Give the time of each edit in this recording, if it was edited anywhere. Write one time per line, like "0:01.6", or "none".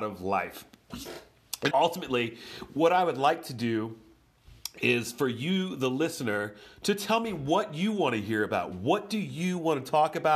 0:01.7